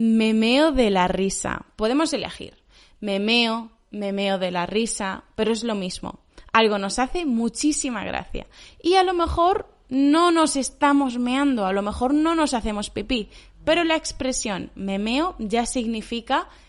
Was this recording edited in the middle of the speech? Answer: no; 0 cuts

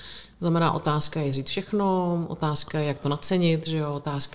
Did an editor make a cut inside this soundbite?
no; 0 cuts

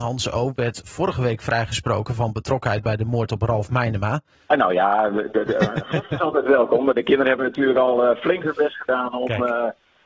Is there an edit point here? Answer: yes; 1 cut; at 4.4 s

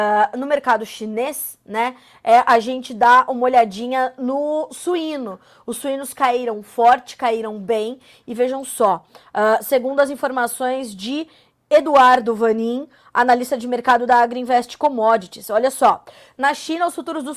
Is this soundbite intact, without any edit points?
yes; 0 cuts

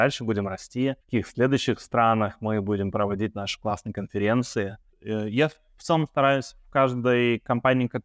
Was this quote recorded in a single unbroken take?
no; 2 cuts; at 1.0 s, 4.9 s

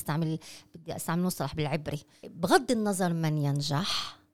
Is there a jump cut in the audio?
no; 0 cuts

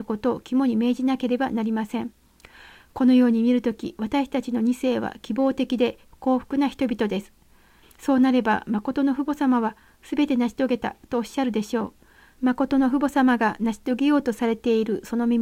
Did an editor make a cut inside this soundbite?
yes; 2 cuts; at 7.8 s, 12.4 s

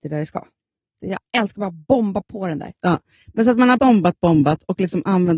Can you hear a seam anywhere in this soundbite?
yes; 2 cuts; at 0.9 s, 3.8 s

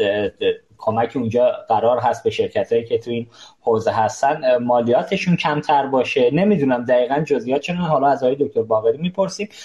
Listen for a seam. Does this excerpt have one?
no; 0 cuts

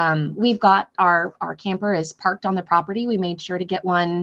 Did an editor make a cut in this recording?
no; 0 cuts

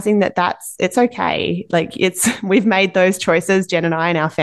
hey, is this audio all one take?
yes; 0 cuts

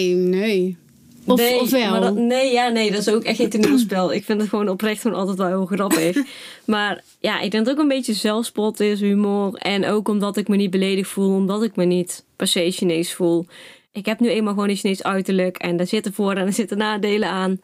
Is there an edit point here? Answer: no; 0 cuts

